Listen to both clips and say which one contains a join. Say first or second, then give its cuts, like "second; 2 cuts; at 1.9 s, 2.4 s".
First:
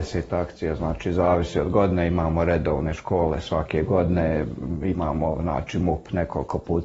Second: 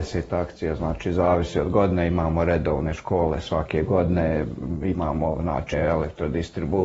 second; 1 cut; at 5.7 s